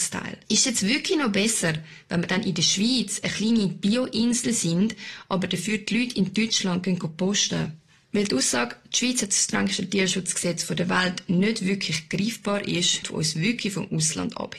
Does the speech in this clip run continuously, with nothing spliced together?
no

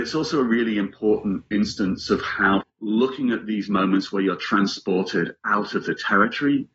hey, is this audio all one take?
no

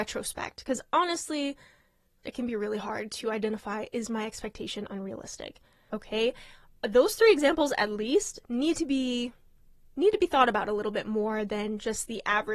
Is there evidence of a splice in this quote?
yes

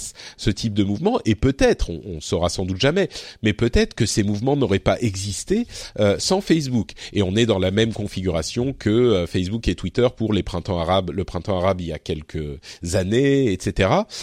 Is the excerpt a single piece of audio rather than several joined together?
yes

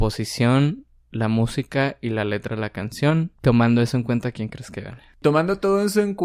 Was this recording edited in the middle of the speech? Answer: no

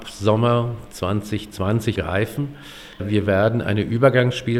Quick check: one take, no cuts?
no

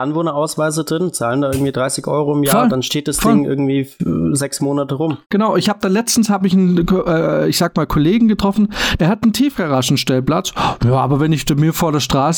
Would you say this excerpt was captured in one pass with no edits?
no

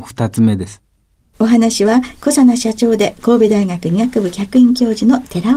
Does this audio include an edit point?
yes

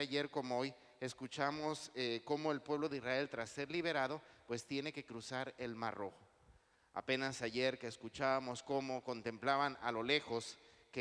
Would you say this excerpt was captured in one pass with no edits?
yes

